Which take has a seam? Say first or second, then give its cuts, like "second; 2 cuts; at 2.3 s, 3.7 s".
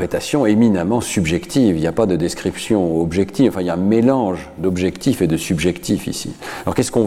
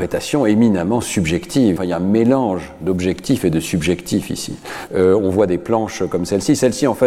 second; 2 cuts; at 1.8 s, 4.9 s